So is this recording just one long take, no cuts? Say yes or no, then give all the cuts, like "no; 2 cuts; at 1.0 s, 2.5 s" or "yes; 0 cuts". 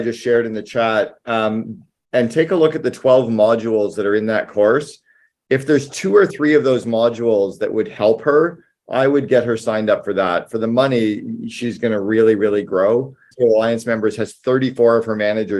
no; 1 cut; at 13.3 s